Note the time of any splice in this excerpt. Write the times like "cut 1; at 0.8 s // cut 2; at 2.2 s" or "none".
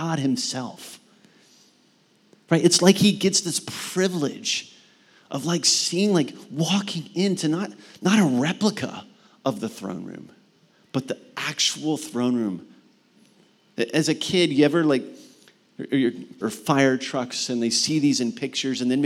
cut 1; at 16.4 s

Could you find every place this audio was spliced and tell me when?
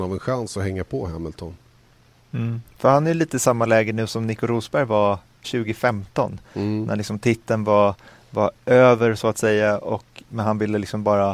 cut 1; at 5.4 s

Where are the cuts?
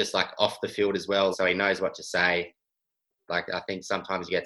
cut 1; at 1.3 s // cut 2; at 3.3 s

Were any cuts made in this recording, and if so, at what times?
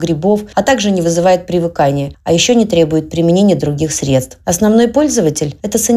cut 1; at 4.4 s

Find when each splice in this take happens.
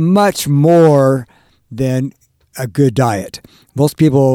none

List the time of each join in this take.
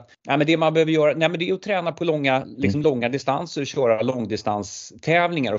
none

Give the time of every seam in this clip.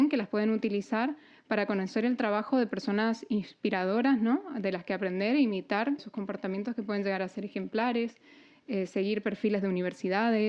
cut 1; at 6.0 s

